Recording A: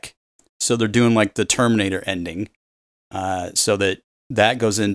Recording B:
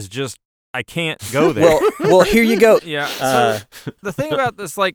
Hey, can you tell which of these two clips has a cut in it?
B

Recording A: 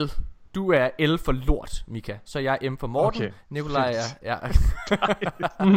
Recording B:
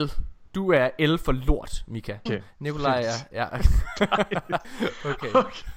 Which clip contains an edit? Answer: B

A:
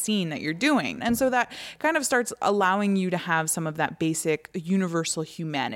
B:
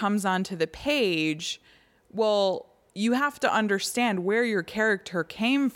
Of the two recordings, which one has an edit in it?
A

